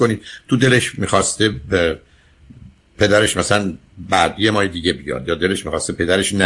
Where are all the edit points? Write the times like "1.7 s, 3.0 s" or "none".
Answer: none